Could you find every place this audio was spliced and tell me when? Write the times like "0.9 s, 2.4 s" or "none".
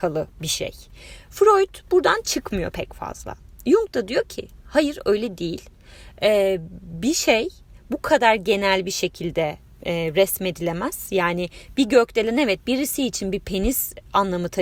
none